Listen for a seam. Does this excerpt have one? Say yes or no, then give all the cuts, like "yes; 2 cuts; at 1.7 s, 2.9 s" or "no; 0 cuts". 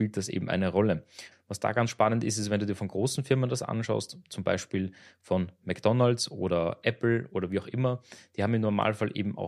yes; 1 cut; at 1.3 s